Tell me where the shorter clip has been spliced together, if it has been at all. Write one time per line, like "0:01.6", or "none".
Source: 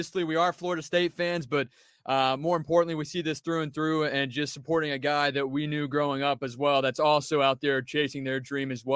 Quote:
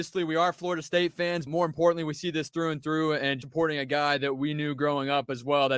0:01.5
0:03.4